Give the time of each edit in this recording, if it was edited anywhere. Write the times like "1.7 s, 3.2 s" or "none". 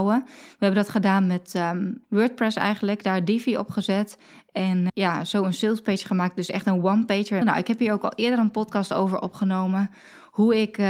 2.0 s, 4.9 s, 7.4 s